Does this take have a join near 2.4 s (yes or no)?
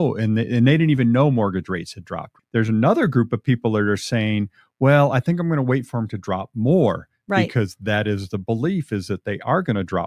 yes